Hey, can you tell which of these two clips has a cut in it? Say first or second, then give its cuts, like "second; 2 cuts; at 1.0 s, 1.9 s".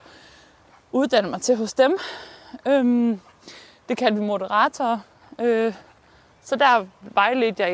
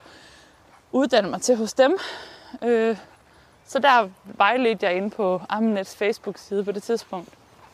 second; 1 cut; at 2.6 s